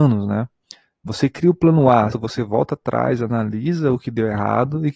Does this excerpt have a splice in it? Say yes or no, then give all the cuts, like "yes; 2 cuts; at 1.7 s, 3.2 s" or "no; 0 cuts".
yes; 1 cut; at 2.1 s